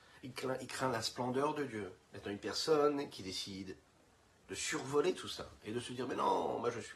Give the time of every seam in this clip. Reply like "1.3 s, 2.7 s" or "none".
2.0 s